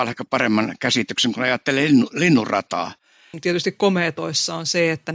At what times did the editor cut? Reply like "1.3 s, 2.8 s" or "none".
3.3 s